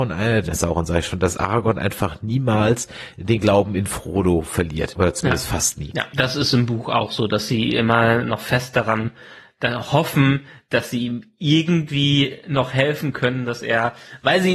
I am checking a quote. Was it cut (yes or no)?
no